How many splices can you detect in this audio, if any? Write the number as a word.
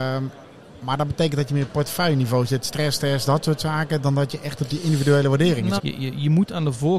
one